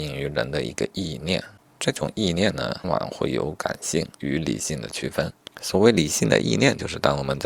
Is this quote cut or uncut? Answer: cut